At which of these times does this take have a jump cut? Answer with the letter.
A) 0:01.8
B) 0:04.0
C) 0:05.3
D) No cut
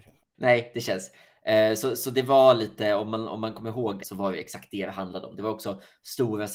B